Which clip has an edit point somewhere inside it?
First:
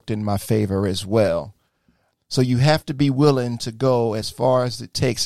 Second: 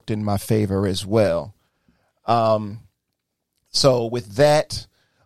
first; 1 cut; at 2.1 s

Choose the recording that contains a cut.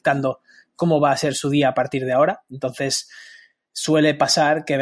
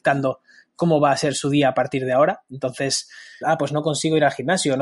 second; 1 cut; at 3.4 s

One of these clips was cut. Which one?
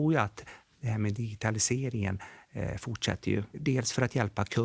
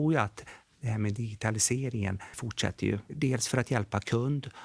second; 1 cut; at 2.3 s

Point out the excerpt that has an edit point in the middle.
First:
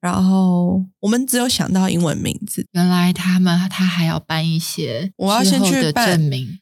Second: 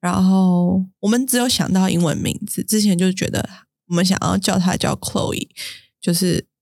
first; 2 cuts; at 2.6 s, 5.1 s

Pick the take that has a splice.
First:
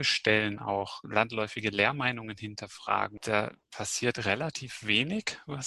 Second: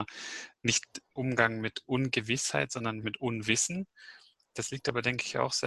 second; 1 cut; at 3.0 s

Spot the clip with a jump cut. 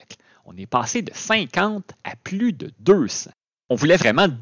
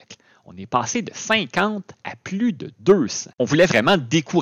second; 1 cut; at 3.3 s

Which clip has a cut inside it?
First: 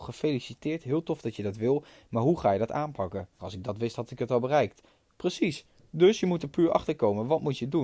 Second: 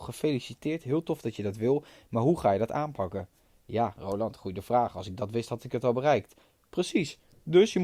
first; 1 cut; at 3.4 s

